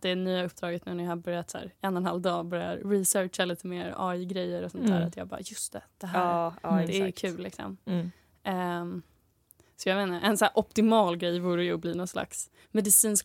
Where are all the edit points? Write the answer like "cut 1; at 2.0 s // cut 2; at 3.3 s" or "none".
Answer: none